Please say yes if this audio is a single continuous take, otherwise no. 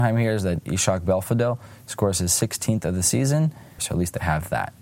no